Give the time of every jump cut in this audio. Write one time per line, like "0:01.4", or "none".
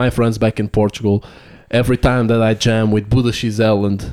none